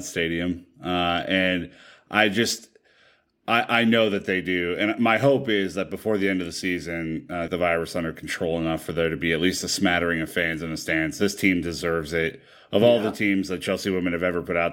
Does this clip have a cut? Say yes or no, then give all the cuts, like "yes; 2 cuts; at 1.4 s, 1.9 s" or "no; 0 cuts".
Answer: yes; 1 cut; at 7.5 s